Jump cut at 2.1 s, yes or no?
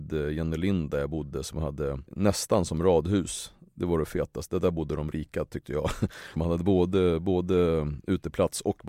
yes